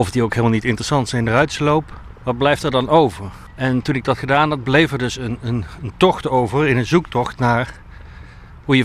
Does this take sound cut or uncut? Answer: uncut